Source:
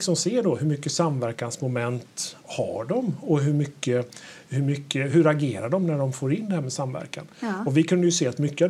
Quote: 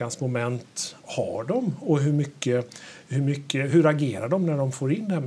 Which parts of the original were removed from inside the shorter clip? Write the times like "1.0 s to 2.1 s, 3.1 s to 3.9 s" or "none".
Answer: none